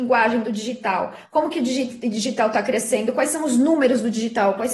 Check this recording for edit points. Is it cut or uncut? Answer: uncut